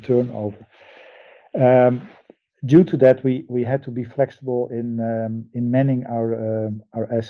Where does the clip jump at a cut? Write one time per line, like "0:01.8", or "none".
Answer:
none